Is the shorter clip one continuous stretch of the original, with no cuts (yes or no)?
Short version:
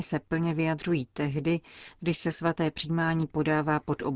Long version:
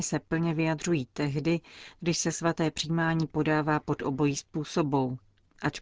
yes